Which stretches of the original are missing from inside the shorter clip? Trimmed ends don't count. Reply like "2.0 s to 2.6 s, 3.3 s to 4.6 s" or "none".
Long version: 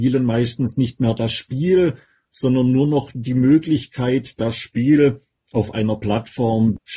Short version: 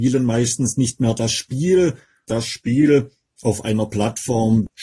2.3 s to 4.4 s